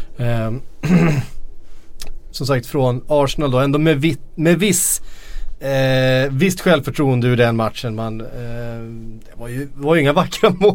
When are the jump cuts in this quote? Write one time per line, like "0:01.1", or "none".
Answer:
none